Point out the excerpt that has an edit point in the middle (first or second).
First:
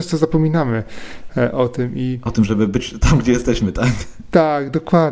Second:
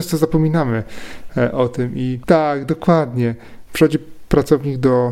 second